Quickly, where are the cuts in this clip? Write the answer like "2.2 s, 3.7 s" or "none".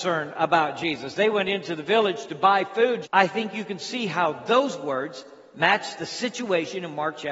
3.0 s